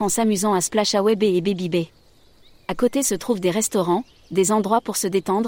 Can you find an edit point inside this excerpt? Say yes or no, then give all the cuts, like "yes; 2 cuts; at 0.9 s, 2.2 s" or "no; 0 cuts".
no; 0 cuts